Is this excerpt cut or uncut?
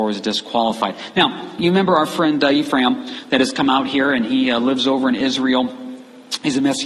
uncut